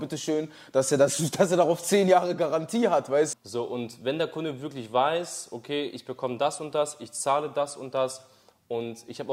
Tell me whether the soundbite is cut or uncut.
cut